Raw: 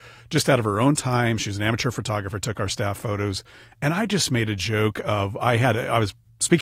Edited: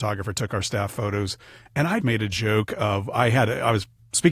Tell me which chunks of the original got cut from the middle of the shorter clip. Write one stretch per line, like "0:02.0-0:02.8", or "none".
0:04.1-0:04.3

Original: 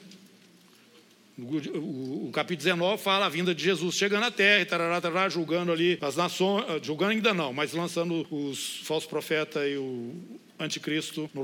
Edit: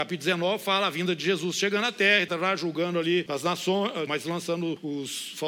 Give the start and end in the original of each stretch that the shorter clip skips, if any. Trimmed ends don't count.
0:04.7-0:05.0
0:06.8-0:07.5

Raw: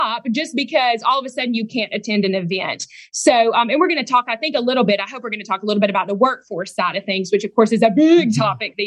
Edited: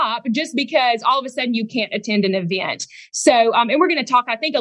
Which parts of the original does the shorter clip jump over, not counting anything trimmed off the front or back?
none

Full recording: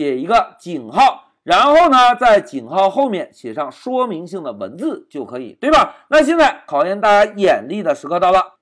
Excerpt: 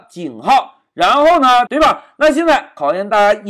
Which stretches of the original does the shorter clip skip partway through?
0:02.2-0:05.6

